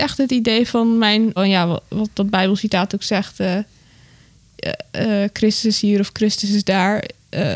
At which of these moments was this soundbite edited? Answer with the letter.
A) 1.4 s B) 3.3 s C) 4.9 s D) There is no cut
A